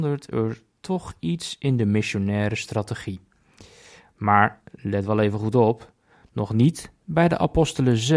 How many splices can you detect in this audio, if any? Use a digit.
0